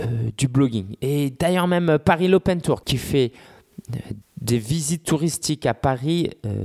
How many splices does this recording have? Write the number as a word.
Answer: two